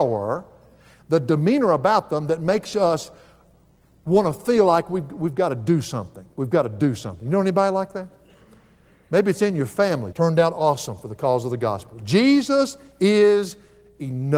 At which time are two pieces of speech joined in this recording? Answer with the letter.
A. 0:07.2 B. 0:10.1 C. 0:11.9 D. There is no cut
B